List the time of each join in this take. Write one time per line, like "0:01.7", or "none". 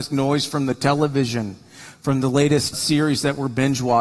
0:02.7

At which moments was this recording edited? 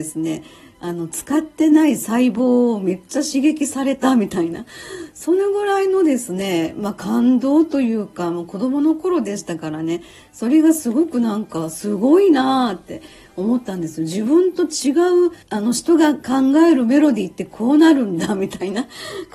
0:15.4

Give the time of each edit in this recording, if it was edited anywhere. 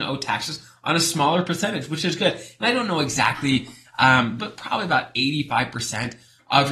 0:04.4

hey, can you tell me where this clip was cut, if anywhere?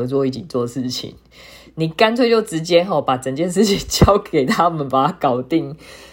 none

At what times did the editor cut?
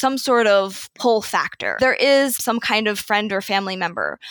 0:01.8

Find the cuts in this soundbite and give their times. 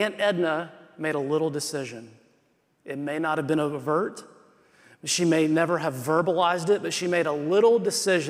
none

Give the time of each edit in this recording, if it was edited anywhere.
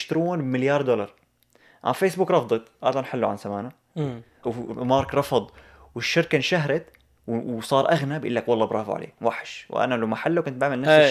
0:04.4

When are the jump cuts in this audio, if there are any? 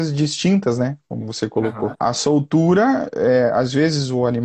0:01.9

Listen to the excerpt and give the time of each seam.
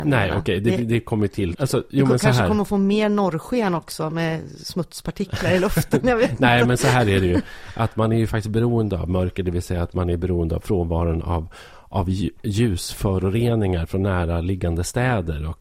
0:01.5

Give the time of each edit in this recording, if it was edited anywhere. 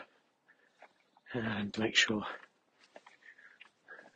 0:01.7

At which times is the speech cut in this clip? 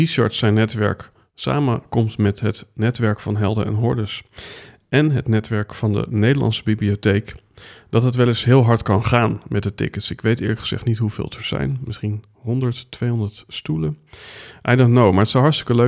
none

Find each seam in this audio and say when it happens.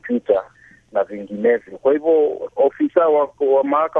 0:02.5

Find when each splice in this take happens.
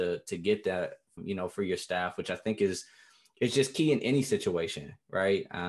0:01.2

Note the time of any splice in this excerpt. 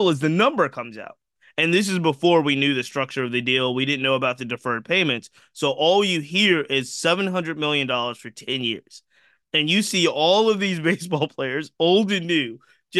none

